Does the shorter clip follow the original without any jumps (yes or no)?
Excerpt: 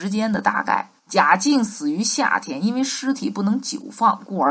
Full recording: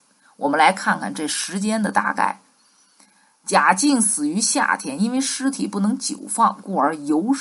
no